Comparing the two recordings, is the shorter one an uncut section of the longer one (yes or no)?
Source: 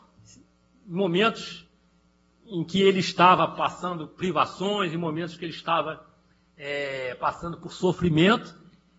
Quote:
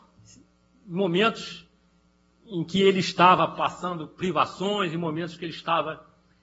yes